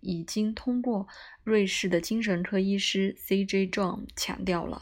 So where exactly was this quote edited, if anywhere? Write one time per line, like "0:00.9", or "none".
none